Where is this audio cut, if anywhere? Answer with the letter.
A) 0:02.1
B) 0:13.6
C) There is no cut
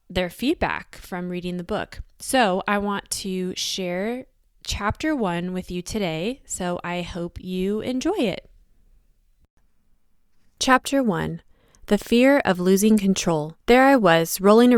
B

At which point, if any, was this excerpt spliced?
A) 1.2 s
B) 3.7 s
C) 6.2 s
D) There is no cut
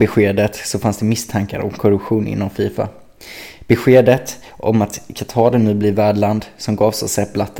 D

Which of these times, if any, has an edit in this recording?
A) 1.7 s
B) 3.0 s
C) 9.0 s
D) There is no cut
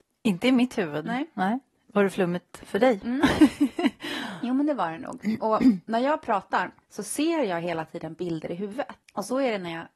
C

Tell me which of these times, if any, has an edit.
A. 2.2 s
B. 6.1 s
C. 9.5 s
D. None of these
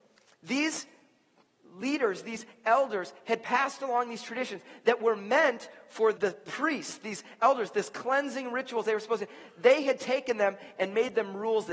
B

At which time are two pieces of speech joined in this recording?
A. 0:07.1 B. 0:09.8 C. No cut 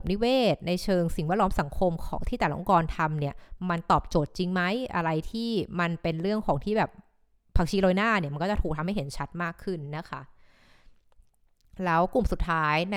C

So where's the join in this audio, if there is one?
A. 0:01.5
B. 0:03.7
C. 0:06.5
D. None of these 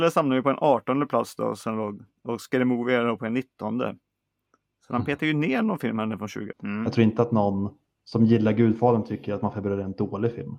C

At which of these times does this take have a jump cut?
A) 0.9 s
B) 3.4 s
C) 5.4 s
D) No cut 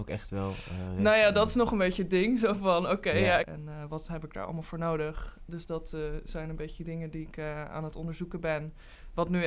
B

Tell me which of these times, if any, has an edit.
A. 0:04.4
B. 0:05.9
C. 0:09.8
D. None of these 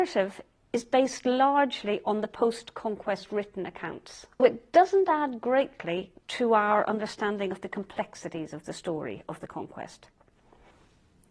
A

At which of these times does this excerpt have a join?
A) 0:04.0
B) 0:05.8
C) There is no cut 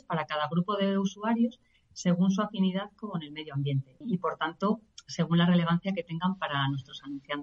A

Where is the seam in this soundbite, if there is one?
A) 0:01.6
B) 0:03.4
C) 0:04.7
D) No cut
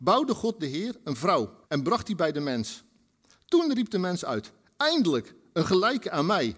A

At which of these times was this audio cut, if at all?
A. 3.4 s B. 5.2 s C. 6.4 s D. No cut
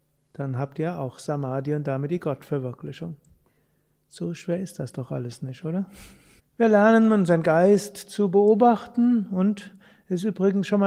C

